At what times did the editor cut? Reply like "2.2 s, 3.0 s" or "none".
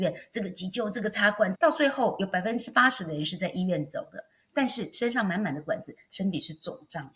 1.5 s